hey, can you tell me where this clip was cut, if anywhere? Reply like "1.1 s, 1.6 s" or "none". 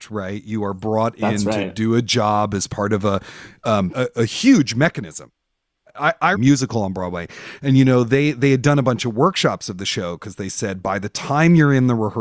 3.9 s, 6.3 s

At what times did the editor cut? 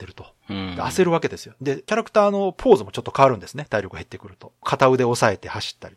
none

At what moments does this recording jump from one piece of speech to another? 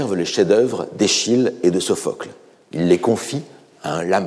none

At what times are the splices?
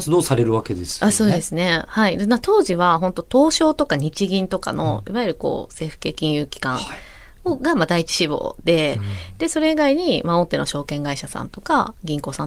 none

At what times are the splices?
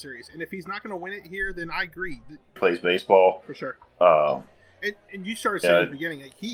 2.6 s

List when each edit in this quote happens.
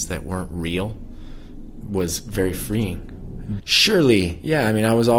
1.8 s, 3.6 s

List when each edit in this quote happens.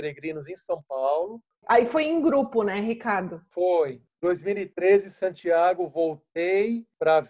1.6 s

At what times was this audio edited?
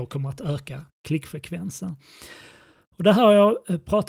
none

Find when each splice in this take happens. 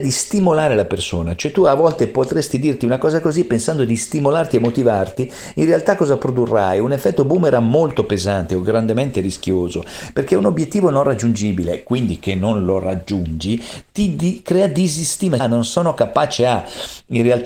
15.4 s

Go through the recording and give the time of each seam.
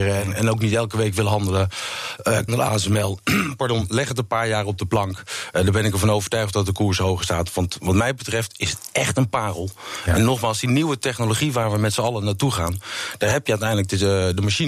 2.5 s

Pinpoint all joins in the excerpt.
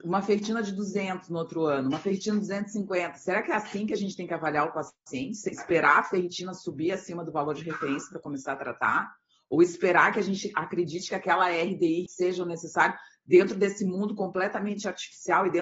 12.1 s

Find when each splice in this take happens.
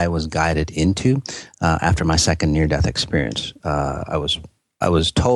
none

